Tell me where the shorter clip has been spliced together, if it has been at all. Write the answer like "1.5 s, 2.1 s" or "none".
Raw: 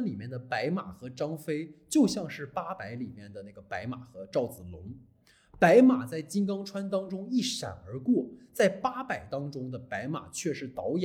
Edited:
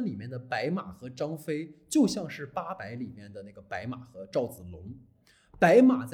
none